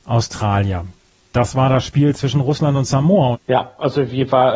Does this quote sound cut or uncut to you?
cut